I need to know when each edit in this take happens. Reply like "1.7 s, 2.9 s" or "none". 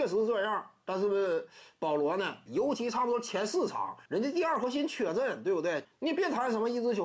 2.5 s, 4.0 s, 5.8 s

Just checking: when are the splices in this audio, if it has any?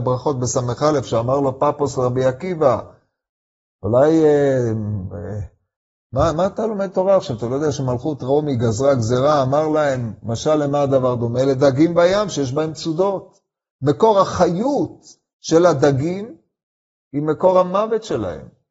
none

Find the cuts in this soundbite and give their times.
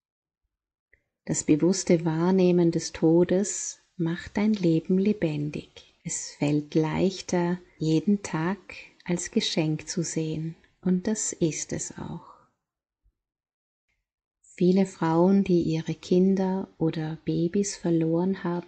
6.0 s, 7.8 s

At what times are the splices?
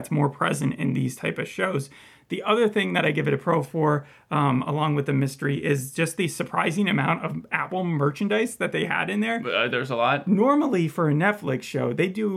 none

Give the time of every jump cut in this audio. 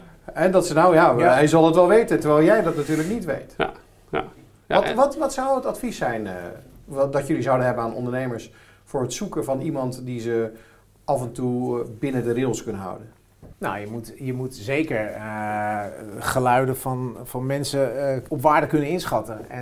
13.5 s, 18.3 s

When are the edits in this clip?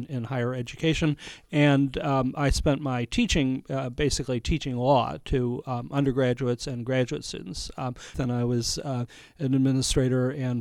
8.1 s

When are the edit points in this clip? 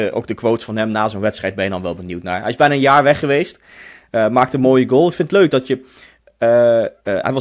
none

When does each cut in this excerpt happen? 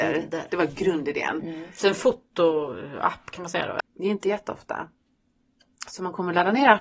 3.8 s

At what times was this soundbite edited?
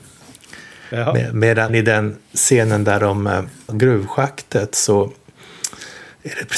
1.7 s, 3.7 s

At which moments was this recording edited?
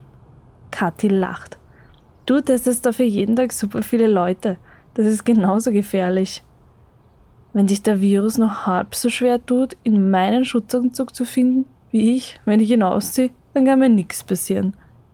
none

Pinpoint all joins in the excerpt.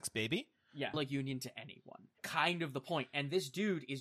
0.9 s, 2.2 s

